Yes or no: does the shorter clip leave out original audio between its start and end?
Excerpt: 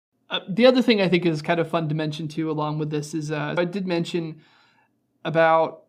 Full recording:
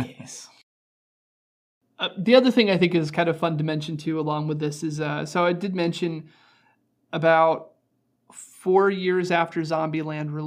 yes